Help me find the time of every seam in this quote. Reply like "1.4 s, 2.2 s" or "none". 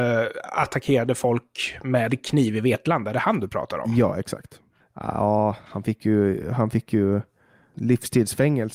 4.8 s